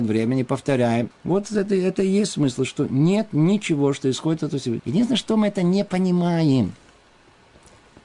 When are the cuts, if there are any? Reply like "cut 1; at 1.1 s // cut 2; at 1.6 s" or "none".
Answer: cut 1; at 1.1 s // cut 2; at 4.8 s